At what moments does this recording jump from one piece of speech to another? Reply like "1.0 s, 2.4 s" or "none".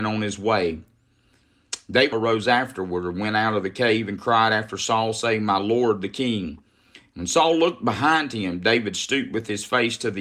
2.1 s